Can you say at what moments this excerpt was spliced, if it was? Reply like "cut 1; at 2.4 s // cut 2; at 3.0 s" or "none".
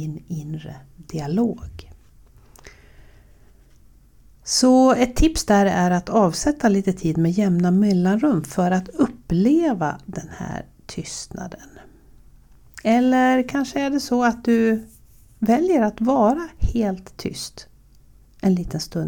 none